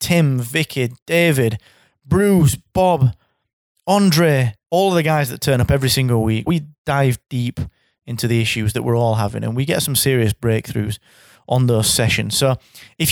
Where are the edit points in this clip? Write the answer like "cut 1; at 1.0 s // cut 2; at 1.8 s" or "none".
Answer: cut 1; at 4.7 s // cut 2; at 6.5 s